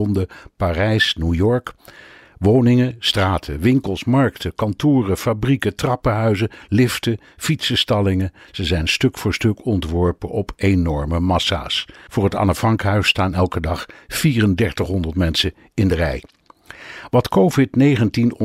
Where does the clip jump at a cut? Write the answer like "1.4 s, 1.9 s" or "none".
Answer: 12.1 s